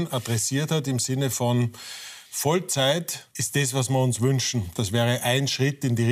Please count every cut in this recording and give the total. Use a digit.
2